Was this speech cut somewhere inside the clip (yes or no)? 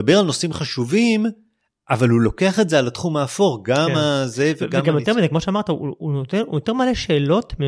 no